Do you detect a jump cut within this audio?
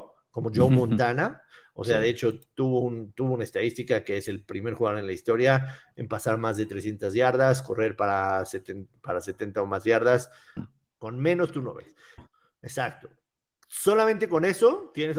yes; 2 cuts; at 10.6 s, 12.2 s

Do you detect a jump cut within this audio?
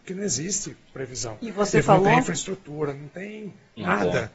no; 0 cuts

